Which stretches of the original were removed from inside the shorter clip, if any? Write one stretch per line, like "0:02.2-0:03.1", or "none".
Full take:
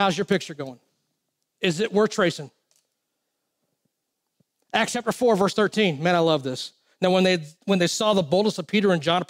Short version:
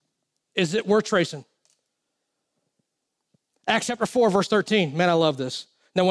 none